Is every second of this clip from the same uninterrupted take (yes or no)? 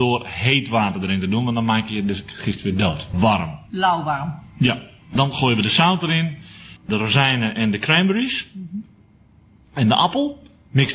no